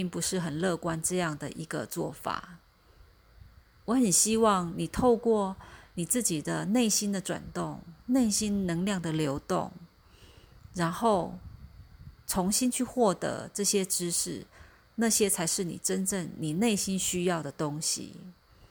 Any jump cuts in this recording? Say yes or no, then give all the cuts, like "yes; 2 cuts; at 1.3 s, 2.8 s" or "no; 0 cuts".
no; 0 cuts